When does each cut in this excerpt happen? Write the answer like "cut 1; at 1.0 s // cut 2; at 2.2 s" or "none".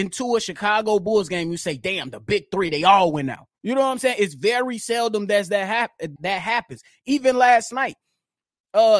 cut 1; at 3.5 s // cut 2; at 6.2 s